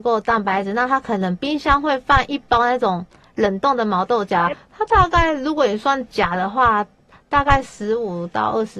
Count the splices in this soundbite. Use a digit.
1